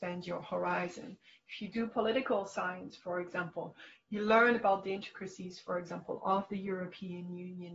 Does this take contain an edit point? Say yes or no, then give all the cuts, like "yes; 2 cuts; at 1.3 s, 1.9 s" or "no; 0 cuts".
no; 0 cuts